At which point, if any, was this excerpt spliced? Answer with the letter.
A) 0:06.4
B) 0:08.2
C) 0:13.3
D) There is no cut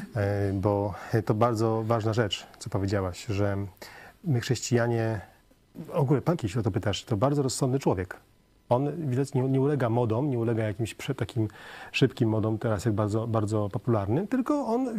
A